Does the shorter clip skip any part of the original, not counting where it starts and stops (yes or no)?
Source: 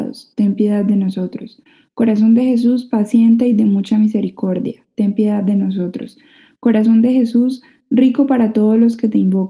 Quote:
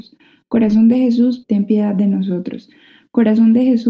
yes